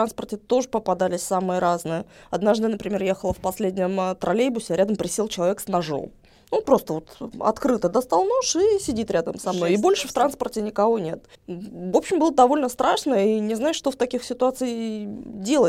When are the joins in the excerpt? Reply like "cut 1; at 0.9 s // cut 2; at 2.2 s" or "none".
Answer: cut 1; at 11.3 s